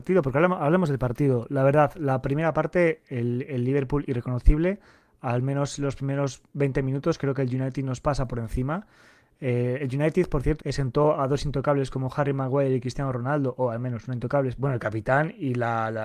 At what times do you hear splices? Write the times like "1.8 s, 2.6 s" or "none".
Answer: 10.6 s, 14.6 s